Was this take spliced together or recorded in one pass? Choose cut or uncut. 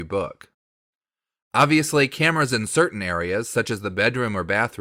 uncut